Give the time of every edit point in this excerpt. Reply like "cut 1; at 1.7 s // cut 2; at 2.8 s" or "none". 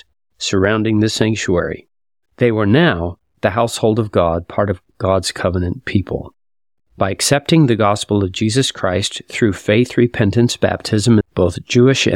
cut 1; at 2.3 s // cut 2; at 11.2 s